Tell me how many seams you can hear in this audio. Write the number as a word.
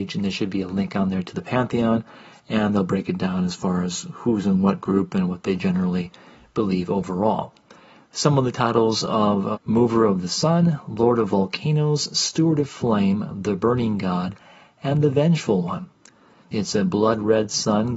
two